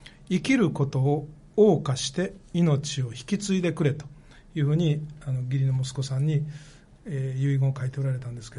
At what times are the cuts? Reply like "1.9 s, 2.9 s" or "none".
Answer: none